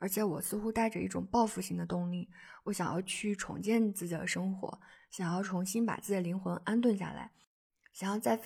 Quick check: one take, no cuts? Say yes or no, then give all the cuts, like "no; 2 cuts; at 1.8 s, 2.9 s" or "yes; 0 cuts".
yes; 0 cuts